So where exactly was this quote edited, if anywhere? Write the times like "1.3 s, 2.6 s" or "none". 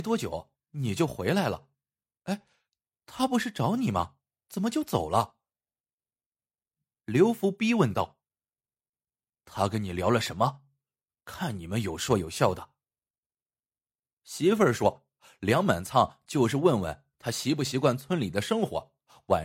none